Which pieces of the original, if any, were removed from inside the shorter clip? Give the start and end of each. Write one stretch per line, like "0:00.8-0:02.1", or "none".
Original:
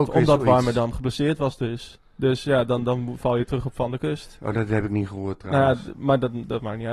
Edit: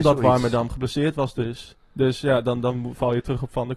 none